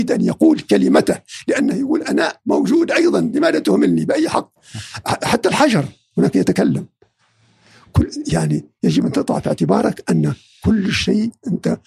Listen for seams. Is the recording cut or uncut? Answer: uncut